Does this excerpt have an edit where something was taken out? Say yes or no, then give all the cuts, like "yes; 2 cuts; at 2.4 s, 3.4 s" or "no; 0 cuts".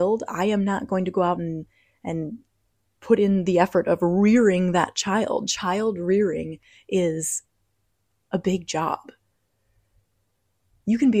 no; 0 cuts